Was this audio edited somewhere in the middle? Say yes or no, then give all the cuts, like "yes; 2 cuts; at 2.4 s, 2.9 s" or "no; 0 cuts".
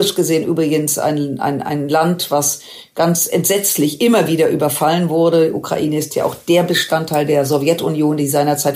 no; 0 cuts